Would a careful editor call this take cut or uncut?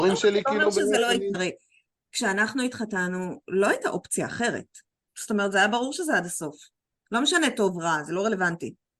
cut